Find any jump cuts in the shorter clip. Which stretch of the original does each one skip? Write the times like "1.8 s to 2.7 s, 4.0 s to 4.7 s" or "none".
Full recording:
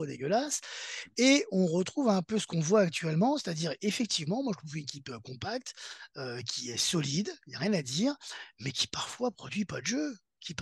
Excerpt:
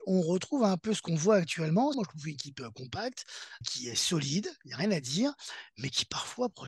3.4 s to 4.4 s, 6.1 s to 6.4 s